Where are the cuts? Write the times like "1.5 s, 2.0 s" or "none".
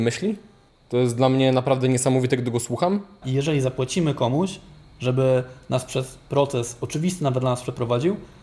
3.2 s